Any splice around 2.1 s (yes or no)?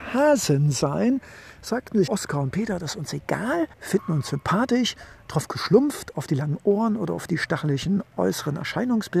yes